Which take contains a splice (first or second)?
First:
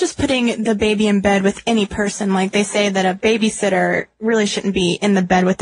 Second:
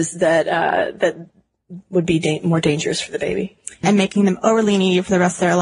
second